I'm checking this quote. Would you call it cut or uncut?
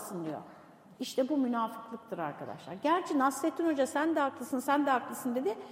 uncut